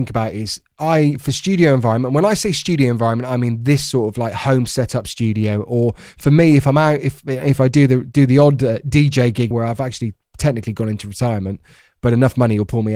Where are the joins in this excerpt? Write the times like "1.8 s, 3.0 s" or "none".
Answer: 9.5 s